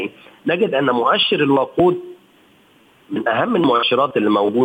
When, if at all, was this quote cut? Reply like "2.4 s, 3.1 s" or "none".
none

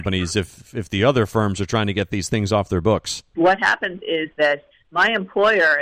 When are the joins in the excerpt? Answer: 3.3 s

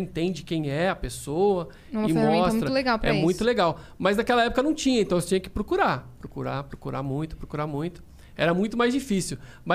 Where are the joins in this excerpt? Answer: none

